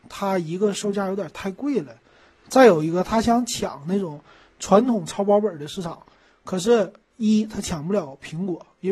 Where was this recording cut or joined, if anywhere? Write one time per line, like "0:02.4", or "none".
none